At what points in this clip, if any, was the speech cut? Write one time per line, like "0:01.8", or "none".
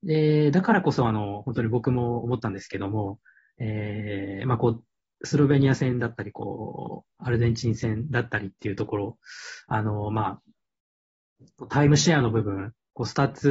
0:07.2